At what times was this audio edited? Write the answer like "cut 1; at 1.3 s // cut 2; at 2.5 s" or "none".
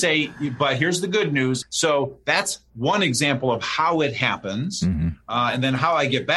cut 1; at 1.6 s